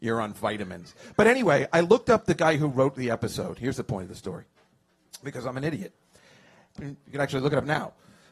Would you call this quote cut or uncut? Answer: cut